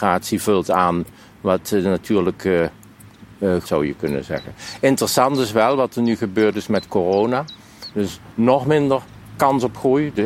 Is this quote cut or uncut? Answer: cut